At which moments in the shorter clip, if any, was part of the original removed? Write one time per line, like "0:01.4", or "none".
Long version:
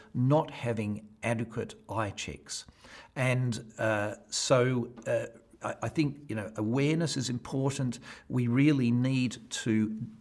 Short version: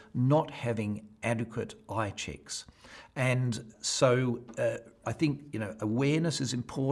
0:03.7
0:05.0